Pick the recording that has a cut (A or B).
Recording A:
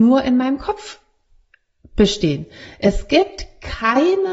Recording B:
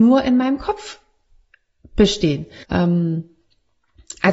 B